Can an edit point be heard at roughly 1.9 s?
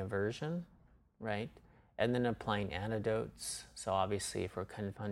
no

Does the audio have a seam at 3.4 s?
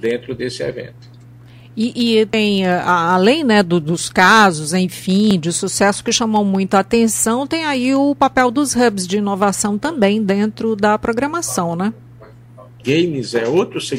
no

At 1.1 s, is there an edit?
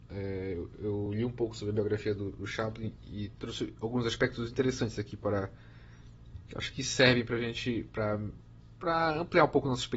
no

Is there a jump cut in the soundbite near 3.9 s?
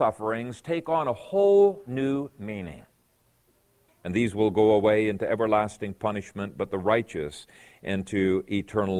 yes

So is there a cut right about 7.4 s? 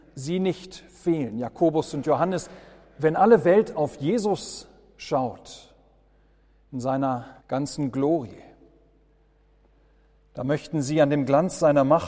yes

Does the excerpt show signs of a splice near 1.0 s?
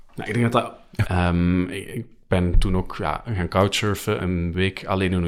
yes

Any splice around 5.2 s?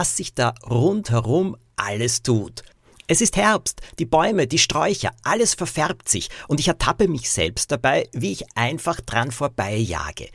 no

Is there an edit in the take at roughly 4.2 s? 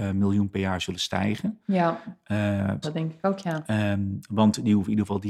no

